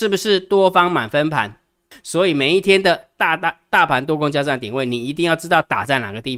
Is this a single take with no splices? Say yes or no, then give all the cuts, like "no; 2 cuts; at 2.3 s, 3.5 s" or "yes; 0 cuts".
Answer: no; 1 cut; at 1.9 s